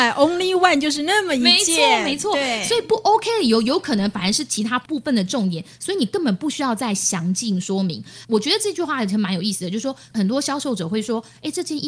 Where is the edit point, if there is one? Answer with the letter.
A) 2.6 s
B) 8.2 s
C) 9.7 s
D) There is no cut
B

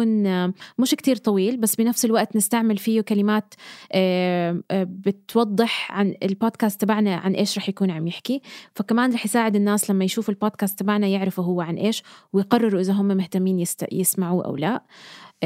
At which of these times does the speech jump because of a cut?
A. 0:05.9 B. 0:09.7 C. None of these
C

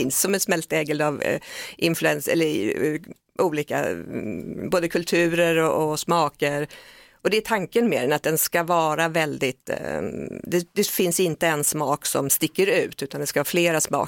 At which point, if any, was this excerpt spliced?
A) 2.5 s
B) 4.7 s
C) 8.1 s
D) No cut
D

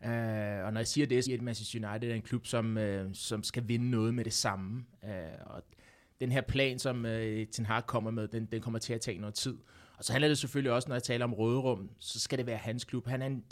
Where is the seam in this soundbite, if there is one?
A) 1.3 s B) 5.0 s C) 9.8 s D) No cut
A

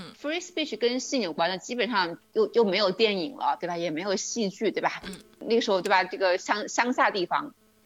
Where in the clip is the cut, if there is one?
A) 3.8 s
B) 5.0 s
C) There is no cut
C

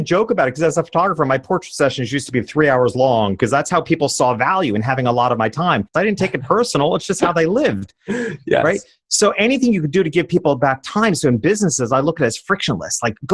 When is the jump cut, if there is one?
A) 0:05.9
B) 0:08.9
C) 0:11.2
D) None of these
A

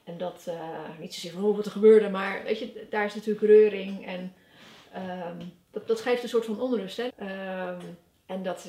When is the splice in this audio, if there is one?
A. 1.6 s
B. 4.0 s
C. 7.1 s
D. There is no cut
C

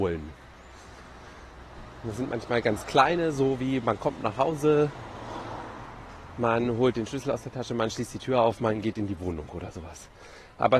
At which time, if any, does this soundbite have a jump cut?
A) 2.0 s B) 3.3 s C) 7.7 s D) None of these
D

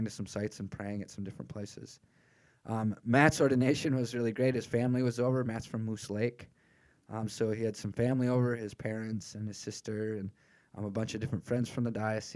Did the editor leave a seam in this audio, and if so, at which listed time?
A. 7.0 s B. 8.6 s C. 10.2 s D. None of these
D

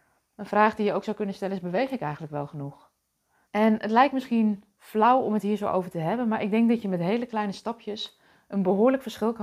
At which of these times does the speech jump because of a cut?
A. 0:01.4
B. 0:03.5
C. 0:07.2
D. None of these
B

